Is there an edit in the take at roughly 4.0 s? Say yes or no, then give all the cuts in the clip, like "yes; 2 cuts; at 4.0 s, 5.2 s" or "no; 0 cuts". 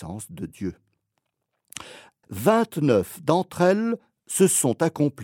no; 1 cut; at 2.2 s